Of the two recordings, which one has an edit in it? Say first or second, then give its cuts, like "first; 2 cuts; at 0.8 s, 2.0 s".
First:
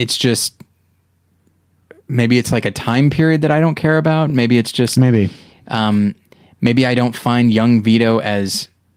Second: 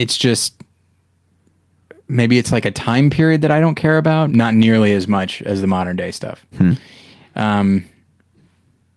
second; 1 cut; at 4.3 s